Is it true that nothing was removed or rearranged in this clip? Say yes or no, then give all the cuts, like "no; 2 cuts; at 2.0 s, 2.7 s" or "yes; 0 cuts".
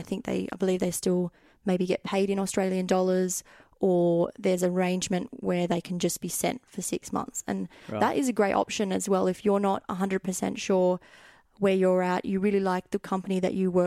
yes; 0 cuts